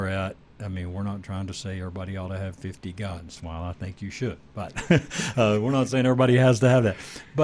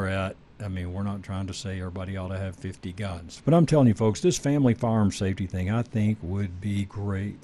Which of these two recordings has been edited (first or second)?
second